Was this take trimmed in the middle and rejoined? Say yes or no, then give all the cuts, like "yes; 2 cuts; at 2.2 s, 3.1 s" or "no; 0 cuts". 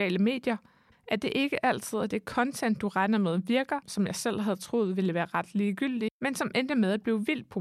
yes; 2 cuts; at 0.9 s, 3.8 s